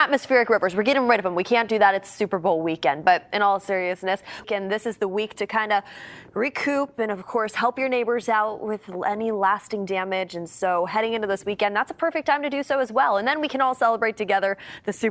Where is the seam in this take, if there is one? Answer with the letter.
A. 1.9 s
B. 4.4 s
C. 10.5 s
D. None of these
B